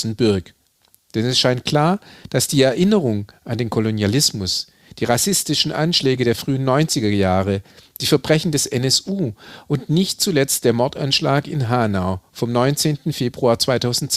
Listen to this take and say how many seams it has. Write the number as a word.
one